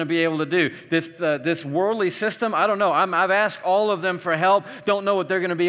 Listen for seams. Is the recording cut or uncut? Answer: cut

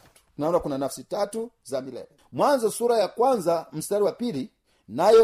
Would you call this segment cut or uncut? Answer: uncut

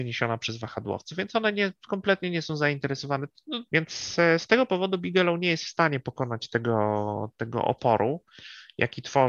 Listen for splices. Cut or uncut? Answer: cut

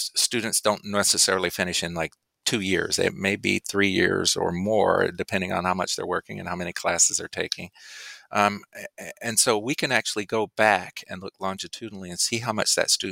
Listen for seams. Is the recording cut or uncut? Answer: uncut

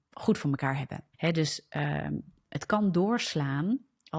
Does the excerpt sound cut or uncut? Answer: cut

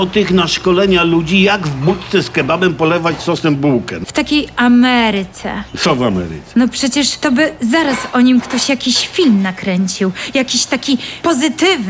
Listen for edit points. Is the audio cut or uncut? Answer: cut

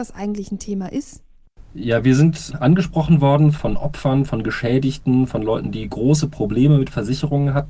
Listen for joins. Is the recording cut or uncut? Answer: uncut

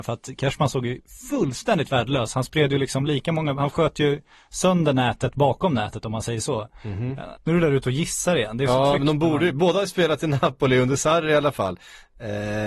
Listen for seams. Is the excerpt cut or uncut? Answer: cut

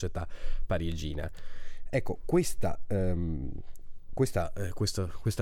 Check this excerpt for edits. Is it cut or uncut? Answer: uncut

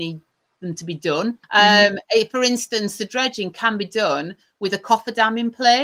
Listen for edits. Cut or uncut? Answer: cut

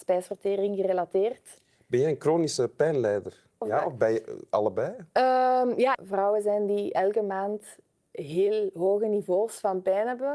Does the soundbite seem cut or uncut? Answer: cut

